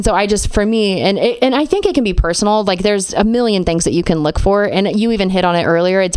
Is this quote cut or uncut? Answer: uncut